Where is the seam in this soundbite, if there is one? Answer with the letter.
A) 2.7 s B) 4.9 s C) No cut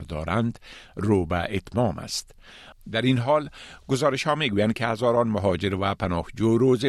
A